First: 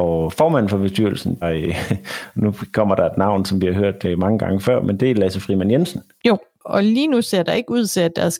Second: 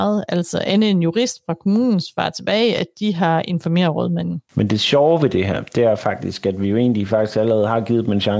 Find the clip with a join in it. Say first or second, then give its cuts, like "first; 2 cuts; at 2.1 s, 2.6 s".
first; 2 cuts; at 1.4 s, 6.2 s